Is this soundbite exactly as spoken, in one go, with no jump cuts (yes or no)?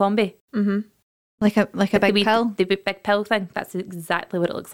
yes